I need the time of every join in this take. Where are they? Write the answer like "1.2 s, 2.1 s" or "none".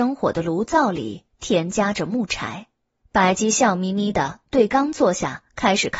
3.0 s